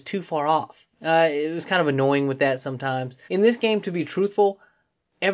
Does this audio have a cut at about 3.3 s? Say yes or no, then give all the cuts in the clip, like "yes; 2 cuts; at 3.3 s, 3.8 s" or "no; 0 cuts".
yes; 1 cut; at 3.3 s